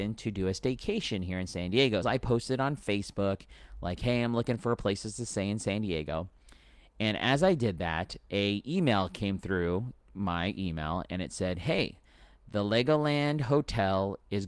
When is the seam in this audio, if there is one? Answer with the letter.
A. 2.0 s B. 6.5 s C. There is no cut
A